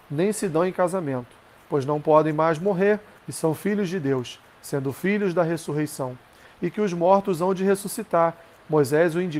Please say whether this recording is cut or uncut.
cut